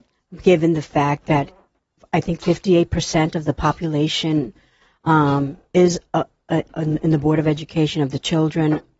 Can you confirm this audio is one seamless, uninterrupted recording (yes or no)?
yes